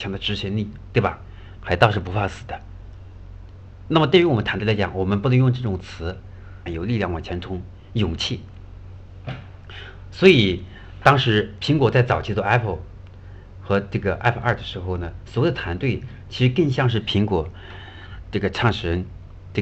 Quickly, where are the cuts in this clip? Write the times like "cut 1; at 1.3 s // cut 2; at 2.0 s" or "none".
cut 1; at 1.6 s // cut 2; at 6.7 s